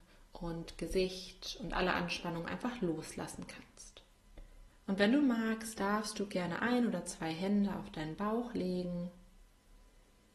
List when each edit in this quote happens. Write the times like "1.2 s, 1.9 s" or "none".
4.7 s